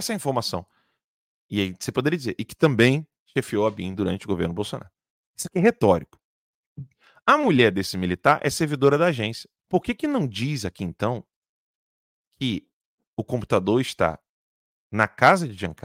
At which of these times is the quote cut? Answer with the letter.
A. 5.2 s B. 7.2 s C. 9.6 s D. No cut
C